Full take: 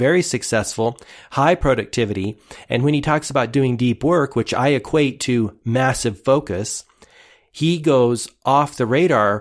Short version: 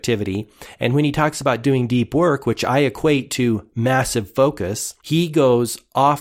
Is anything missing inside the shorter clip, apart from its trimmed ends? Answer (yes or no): yes